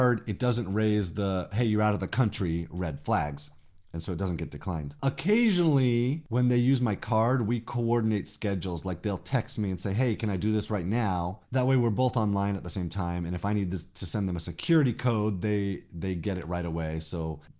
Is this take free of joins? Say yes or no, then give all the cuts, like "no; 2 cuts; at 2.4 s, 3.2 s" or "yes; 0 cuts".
yes; 0 cuts